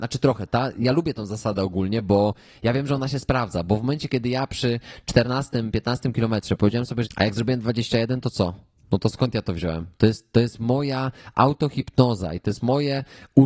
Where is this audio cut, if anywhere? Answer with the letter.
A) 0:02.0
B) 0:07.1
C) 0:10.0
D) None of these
B